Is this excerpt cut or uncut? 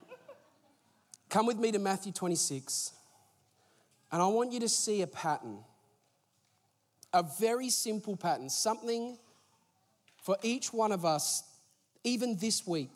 uncut